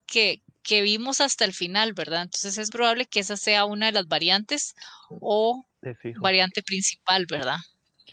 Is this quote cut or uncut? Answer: cut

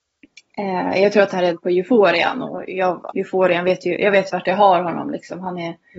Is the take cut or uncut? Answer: cut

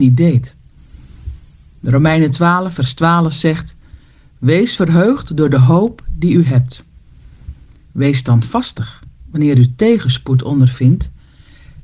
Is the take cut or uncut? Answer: uncut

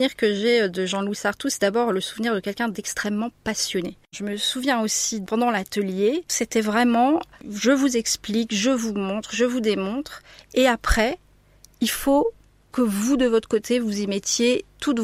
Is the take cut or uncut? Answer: cut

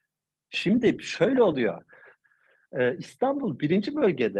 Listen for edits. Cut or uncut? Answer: uncut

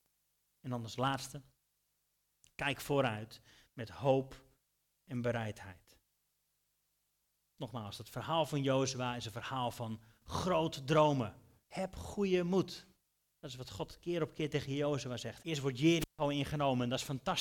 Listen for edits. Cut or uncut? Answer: cut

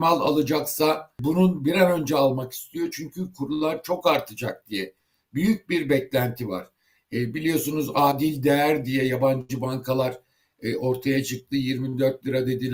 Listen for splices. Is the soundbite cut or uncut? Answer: uncut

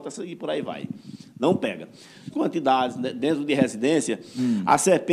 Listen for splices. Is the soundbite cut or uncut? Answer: cut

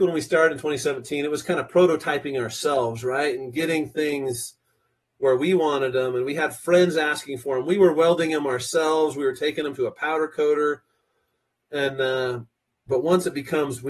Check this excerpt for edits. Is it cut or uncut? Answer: cut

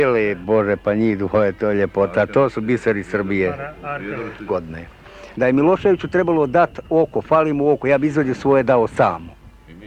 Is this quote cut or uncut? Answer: cut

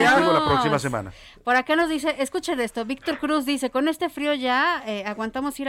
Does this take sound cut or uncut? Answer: uncut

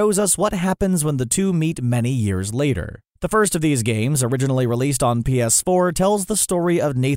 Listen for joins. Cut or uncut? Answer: cut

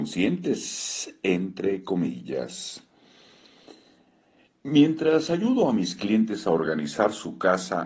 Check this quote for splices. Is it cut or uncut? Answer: uncut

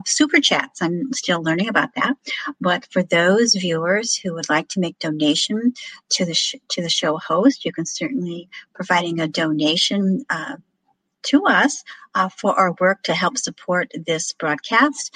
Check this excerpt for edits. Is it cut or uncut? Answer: uncut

